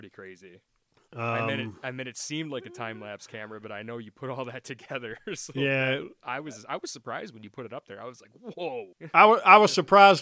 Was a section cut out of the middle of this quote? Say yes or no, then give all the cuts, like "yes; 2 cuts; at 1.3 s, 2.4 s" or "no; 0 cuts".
yes; 1 cut; at 8.9 s